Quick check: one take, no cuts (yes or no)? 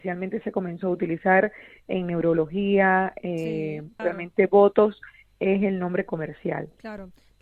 no